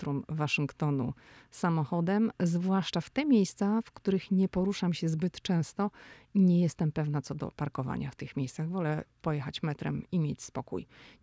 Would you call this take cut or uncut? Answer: cut